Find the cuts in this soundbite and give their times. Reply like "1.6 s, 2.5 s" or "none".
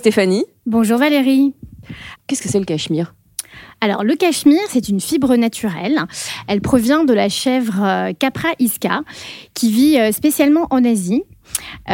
2.2 s